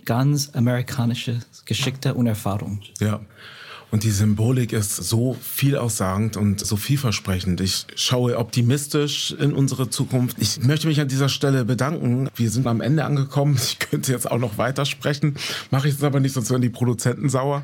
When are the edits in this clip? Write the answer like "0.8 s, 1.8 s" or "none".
6.6 s, 10.3 s, 12.7 s